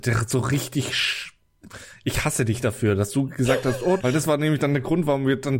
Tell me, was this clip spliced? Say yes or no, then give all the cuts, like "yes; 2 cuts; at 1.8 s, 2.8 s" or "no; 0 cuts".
yes; 1 cut; at 4.0 s